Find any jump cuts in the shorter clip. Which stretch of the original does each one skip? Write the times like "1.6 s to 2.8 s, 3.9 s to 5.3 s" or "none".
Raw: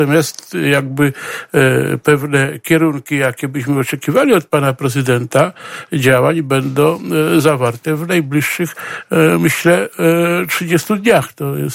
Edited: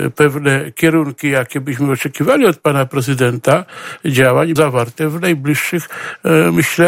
6.4 s to 7.4 s